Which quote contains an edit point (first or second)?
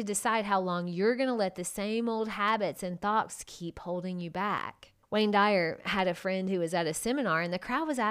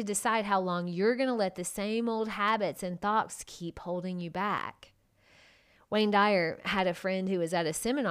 first